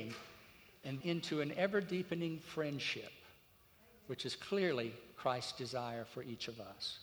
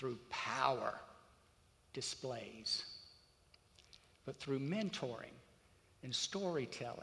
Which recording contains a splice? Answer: first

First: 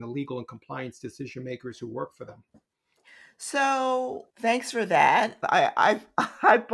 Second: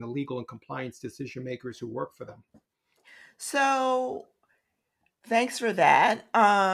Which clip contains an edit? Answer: first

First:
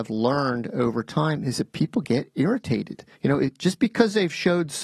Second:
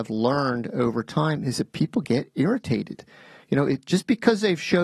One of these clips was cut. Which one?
first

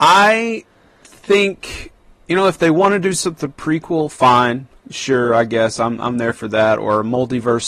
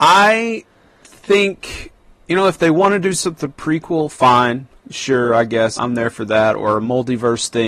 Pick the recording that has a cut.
second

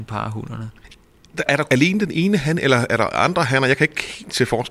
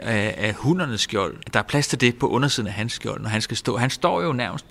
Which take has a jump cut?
second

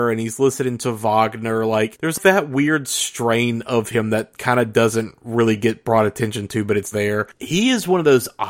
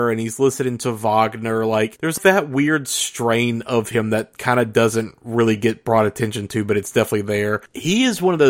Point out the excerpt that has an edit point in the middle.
first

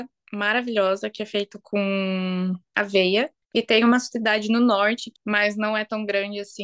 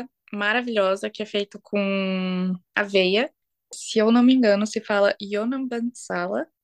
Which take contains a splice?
first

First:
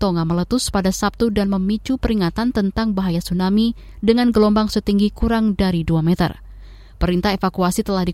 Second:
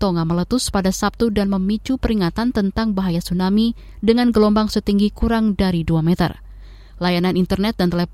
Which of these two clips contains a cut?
second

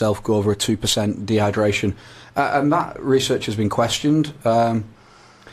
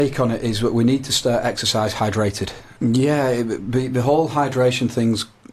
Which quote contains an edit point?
second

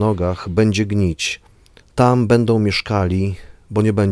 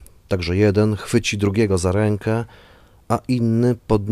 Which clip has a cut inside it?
first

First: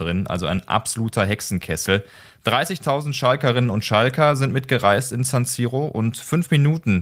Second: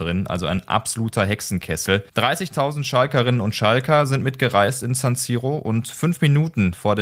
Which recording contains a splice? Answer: second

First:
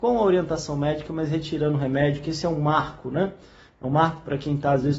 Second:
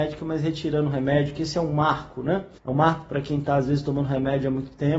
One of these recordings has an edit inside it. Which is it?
second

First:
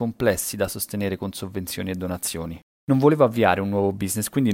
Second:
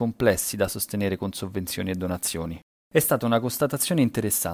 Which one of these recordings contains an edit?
first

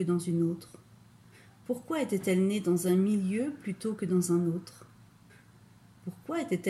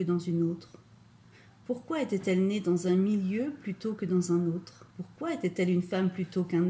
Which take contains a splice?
second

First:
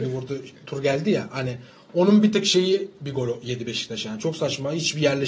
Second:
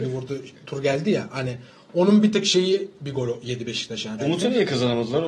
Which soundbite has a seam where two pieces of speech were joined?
second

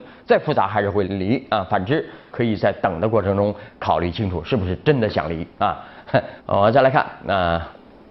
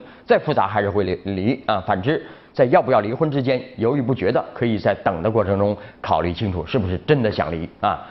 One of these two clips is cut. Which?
first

